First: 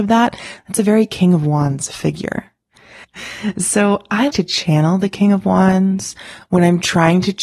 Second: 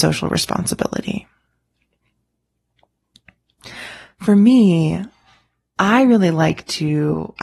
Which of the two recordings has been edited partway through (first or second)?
first